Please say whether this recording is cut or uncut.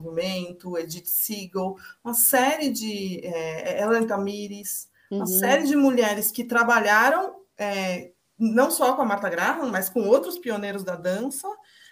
uncut